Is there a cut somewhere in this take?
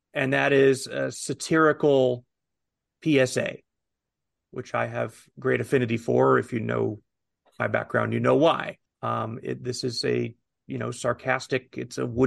yes; 1 cut; at 8.9 s

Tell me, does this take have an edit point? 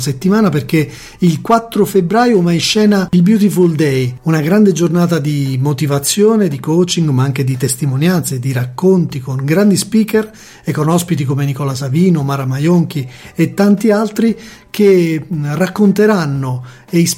no; 0 cuts

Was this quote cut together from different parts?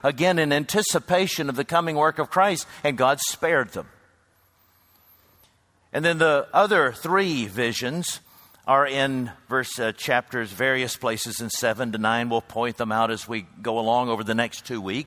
no; 0 cuts

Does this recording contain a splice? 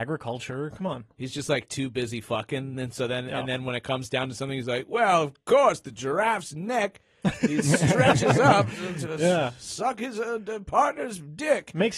no; 0 cuts

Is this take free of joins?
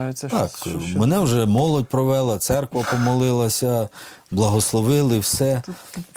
yes; 0 cuts

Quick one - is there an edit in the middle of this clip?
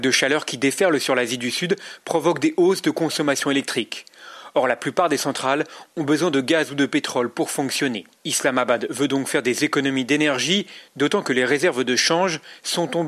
yes; 1 cut; at 8.2 s

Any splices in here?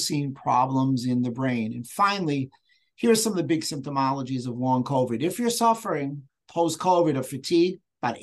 no; 0 cuts

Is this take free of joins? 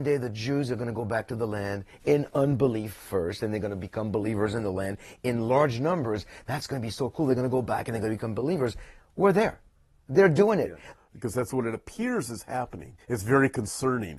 no; 2 cuts; at 10.9 s, 13.0 s

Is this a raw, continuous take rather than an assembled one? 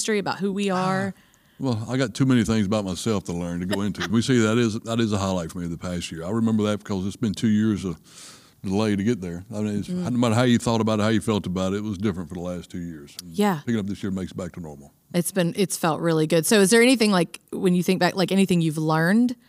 no; 1 cut; at 4.1 s

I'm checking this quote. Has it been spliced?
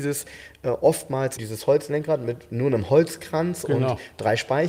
yes; 1 cut; at 1.4 s

